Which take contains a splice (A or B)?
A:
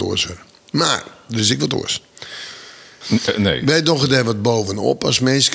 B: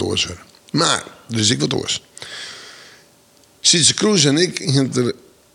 A